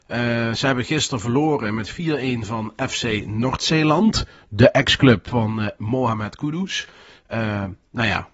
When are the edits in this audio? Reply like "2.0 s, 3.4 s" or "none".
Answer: none